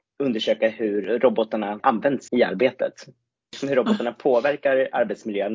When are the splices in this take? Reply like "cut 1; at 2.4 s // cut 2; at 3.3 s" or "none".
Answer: cut 1; at 2.3 s